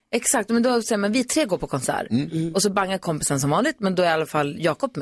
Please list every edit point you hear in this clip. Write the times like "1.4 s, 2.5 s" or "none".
none